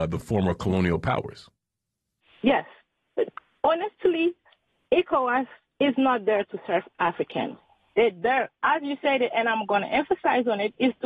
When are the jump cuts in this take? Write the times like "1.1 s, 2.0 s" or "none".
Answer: none